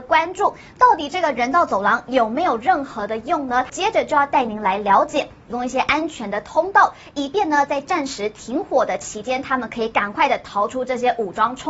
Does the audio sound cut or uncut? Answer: cut